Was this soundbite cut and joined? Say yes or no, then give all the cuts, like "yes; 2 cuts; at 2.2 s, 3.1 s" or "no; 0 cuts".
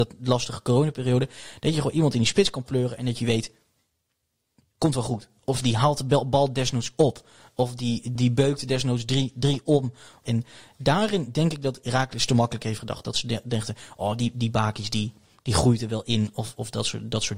yes; 2 cuts; at 8.2 s, 10.2 s